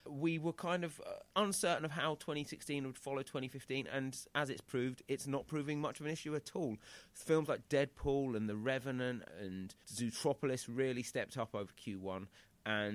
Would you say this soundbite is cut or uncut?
uncut